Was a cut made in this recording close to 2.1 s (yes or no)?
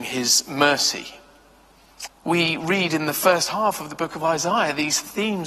yes